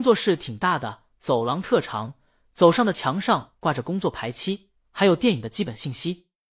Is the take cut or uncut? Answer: uncut